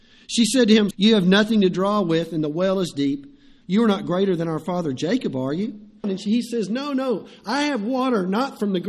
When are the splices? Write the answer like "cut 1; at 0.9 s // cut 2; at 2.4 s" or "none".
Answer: cut 1; at 0.9 s // cut 2; at 3.6 s // cut 3; at 6.0 s